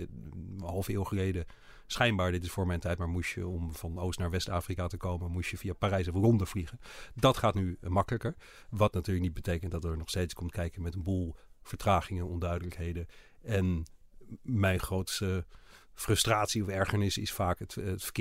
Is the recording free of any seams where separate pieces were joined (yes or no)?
yes